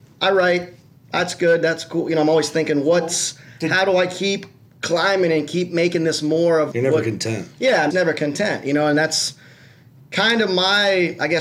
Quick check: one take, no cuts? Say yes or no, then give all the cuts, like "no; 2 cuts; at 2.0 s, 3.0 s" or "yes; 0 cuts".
no; 2 cuts; at 6.7 s, 7.9 s